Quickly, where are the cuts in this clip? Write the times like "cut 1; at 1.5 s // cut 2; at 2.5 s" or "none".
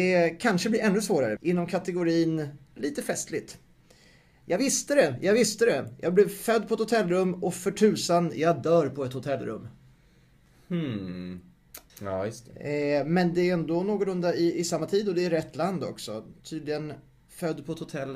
cut 1; at 1.4 s // cut 2; at 11.9 s